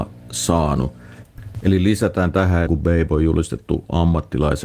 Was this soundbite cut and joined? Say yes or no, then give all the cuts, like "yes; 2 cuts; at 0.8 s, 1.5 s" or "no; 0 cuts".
yes; 2 cuts; at 1.6 s, 2.7 s